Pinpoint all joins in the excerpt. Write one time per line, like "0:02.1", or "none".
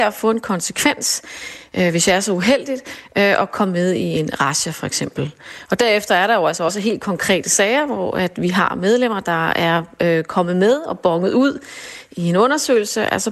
none